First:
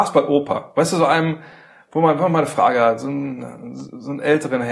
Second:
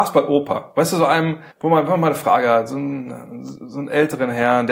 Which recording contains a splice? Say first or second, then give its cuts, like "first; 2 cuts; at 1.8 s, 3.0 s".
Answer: second; 1 cut; at 1.5 s